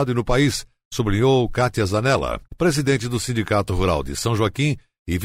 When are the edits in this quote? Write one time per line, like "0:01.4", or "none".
0:02.5